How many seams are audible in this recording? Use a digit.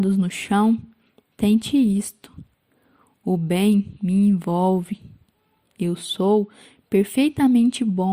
0